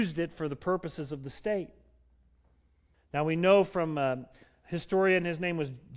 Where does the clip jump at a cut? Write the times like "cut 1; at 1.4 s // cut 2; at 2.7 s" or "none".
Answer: cut 1; at 2.9 s